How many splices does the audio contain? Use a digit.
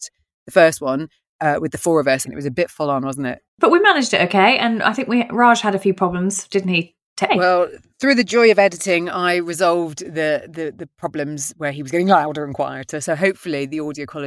3